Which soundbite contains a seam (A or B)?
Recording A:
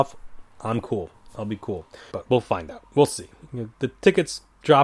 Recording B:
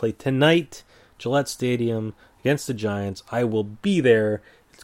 A